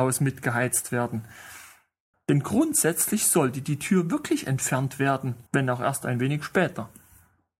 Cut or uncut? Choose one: cut